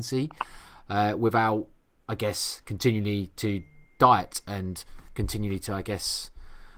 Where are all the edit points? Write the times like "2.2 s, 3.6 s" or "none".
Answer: none